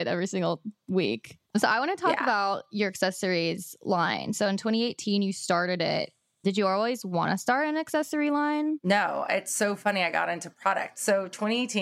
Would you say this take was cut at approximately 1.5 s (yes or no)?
yes